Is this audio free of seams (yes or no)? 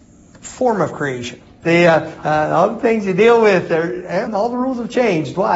no